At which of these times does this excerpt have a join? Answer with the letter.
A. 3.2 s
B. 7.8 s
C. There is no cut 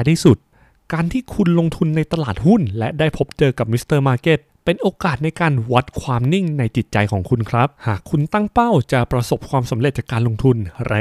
B